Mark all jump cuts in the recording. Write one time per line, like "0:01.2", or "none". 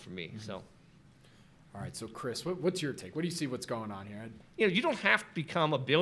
0:04.4